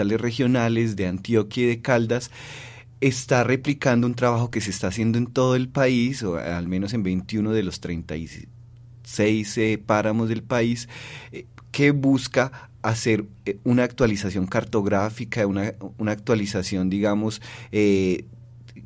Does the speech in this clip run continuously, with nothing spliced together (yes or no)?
yes